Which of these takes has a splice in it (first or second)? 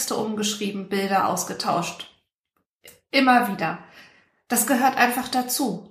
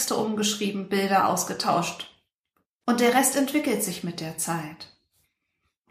second